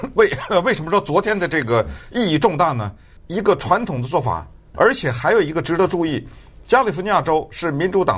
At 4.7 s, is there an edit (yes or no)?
yes